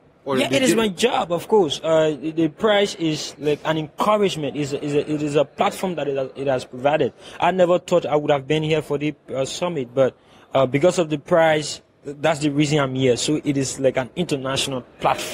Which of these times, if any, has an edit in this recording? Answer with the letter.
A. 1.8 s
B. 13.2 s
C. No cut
C